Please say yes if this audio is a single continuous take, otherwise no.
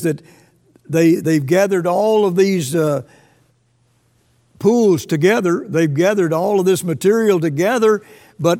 yes